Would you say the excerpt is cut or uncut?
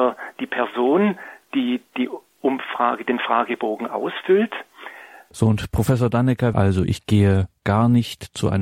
cut